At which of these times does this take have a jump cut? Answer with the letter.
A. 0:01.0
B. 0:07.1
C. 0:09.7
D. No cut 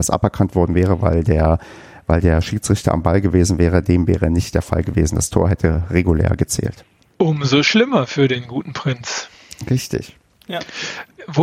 B